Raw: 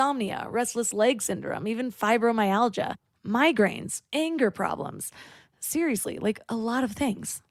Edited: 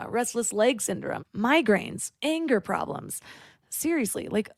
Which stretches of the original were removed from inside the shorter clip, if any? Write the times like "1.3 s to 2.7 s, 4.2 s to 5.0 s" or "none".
1.6 s to 3.1 s